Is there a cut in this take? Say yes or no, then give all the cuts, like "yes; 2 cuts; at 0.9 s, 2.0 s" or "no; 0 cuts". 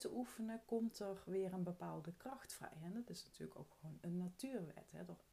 no; 0 cuts